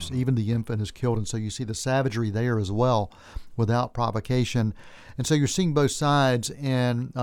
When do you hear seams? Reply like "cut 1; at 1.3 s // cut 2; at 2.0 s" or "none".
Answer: none